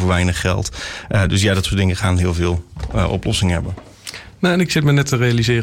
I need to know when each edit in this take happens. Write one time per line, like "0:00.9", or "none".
none